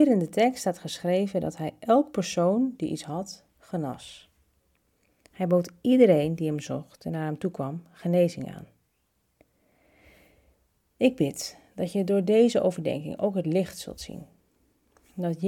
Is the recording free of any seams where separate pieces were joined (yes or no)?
yes